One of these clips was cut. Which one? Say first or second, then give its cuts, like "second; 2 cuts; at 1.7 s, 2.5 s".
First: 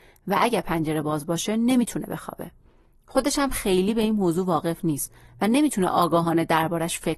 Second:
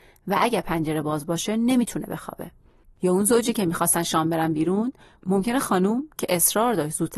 second; 1 cut; at 2.8 s